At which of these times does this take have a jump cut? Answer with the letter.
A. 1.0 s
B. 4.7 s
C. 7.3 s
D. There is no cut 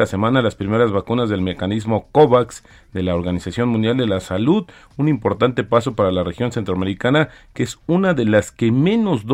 D